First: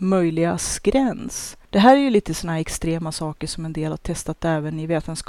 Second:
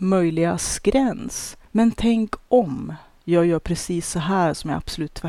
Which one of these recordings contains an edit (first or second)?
second